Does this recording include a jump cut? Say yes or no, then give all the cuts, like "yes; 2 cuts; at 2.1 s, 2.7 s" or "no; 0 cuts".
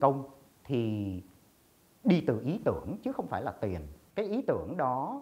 no; 0 cuts